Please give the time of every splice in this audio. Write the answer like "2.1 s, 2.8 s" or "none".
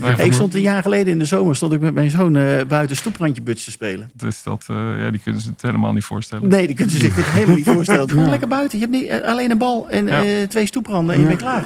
4.1 s, 8.1 s